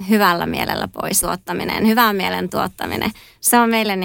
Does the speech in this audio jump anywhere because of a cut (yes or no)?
yes